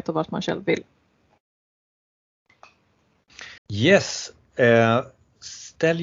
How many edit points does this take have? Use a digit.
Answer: 1